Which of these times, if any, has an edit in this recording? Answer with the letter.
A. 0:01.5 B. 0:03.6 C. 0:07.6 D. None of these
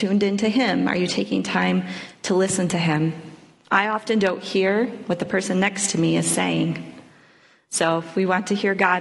D